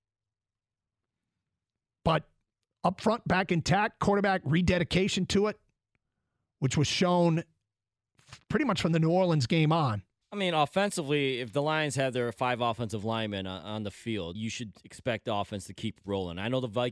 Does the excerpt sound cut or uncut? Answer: cut